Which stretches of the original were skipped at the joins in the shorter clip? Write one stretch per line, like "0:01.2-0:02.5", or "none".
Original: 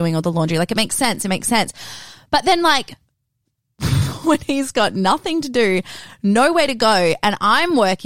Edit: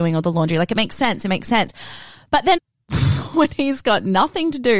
0:02.6-0:03.5